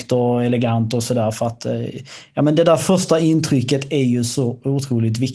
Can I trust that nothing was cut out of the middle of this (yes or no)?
yes